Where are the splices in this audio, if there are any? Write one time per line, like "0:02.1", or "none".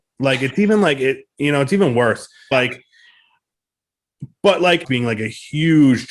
0:02.5
0:04.8